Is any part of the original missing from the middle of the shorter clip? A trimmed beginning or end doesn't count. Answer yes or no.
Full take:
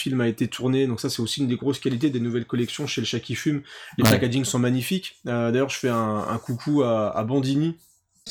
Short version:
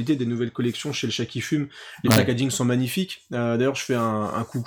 no